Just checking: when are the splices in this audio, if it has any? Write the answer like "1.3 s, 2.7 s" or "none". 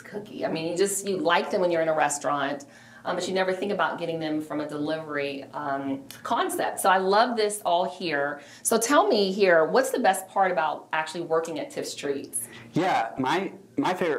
none